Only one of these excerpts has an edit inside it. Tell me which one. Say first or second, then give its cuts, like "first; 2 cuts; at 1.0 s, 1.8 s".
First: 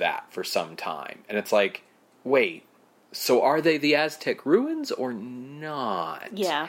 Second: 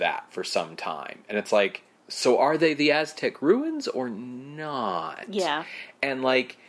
second; 1 cut; at 2.0 s